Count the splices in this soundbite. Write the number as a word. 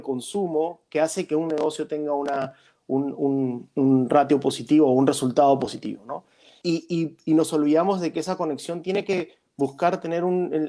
one